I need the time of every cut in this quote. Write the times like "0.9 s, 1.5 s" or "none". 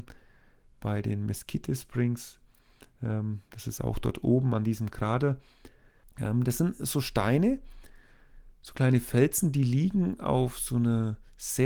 6.0 s